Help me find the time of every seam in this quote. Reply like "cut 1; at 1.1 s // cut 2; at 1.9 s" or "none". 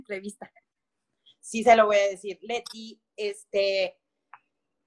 none